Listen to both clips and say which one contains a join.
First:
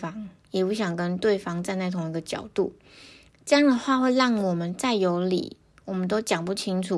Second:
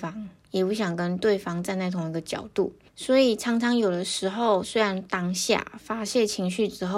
second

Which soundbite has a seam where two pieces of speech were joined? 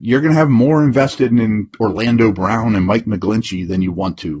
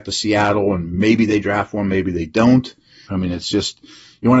second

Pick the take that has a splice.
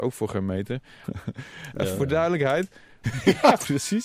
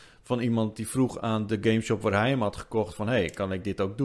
first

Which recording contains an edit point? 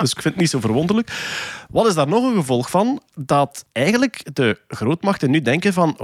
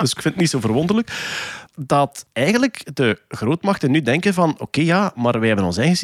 second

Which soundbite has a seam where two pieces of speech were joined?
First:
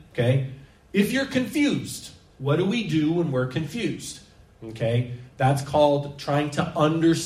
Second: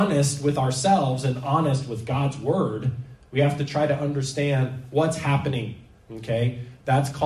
first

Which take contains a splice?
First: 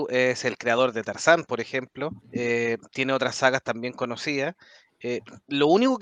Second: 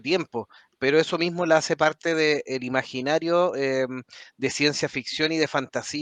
first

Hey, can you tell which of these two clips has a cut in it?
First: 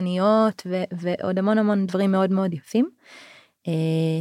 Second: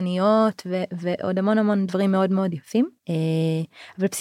second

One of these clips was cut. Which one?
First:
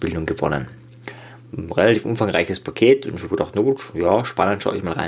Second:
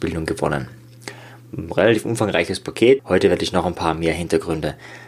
second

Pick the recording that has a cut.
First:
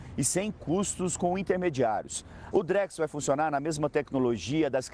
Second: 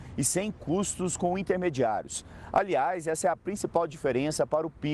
first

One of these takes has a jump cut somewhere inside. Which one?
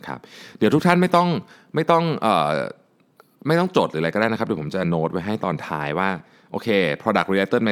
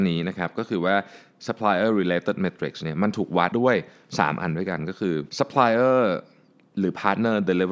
second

